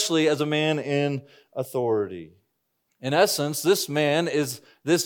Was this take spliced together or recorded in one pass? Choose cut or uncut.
cut